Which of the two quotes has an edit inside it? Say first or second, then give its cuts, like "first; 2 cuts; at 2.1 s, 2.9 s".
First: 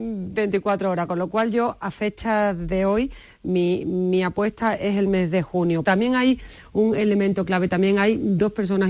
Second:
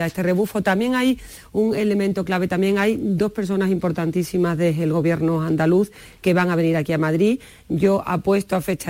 first; 1 cut; at 5.8 s